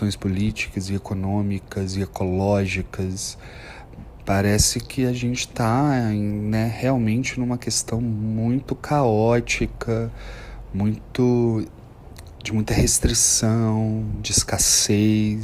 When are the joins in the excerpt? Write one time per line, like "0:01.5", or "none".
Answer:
none